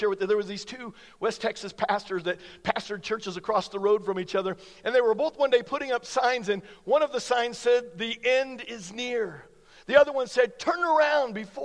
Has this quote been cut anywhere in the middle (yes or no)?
no